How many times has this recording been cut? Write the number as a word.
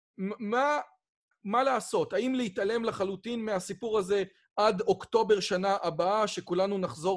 one